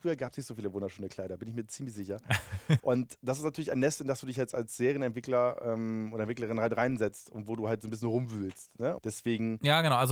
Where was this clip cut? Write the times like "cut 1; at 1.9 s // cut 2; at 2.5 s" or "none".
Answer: cut 1; at 2.8 s // cut 2; at 9.0 s